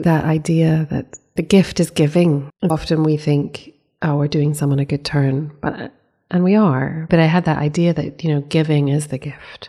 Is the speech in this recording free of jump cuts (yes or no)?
no